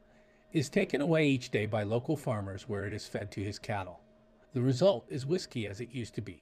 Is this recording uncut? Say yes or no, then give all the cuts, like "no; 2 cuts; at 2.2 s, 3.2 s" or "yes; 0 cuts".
no; 1 cut; at 4.4 s